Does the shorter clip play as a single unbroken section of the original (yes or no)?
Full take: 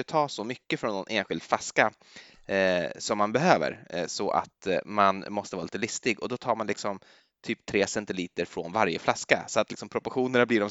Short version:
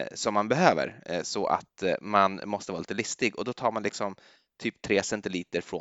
yes